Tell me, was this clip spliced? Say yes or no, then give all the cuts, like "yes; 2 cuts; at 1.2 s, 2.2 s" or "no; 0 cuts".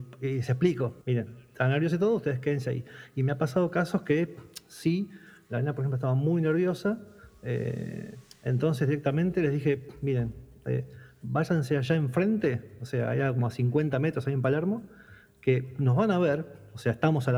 yes; 1 cut; at 1.0 s